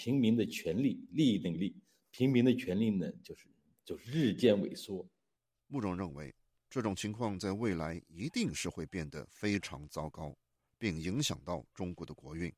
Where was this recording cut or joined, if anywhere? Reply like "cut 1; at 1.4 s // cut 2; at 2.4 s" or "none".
none